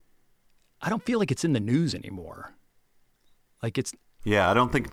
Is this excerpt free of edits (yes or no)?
yes